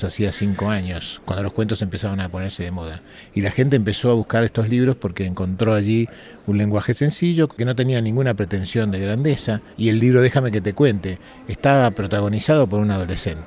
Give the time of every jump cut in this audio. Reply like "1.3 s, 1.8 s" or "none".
7.5 s, 9.7 s